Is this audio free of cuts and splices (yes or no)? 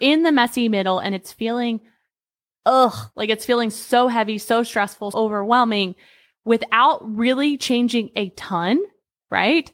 no